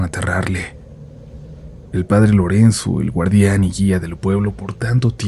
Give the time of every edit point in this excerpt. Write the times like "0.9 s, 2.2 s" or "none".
1.9 s

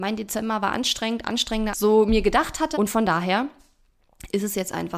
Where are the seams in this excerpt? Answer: 1.7 s, 2.7 s

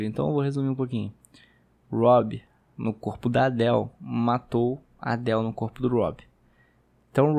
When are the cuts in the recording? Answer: 1.7 s

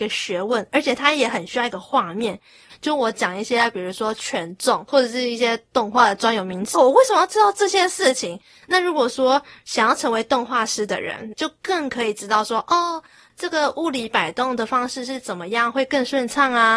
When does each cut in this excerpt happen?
2.7 s, 6.7 s, 11.3 s

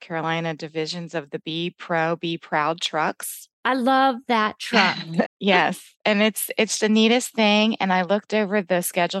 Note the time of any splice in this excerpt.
5.2 s, 6.8 s

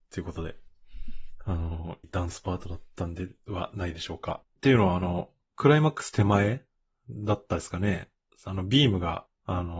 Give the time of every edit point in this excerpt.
2.0 s, 4.4 s

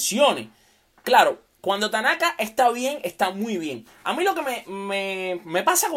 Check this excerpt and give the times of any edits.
none

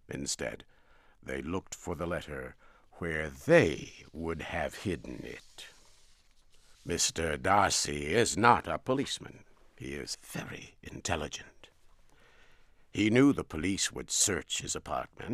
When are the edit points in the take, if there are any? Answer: 6.7 s, 10.1 s

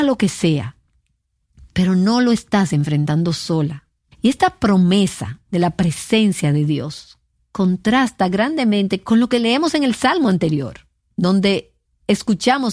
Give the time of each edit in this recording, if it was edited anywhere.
4.1 s

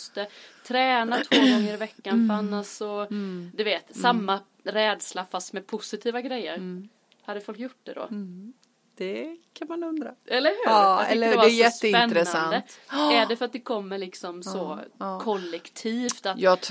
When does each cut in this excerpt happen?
none

